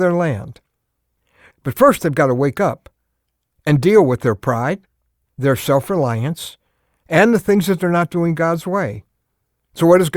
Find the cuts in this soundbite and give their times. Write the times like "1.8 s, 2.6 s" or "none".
1.5 s, 7.0 s